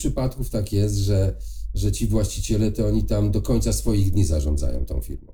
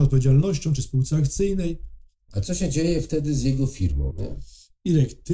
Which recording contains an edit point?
second; 2 cuts; at 2.3 s, 4.1 s

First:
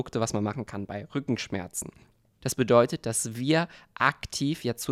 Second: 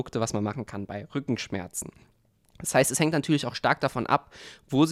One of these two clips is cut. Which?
first; 1 cut; at 2.4 s

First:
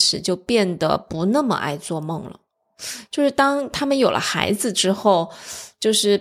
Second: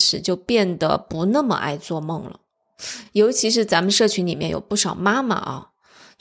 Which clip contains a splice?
first; 1 cut; at 3.1 s

